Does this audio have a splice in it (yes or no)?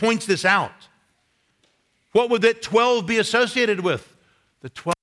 no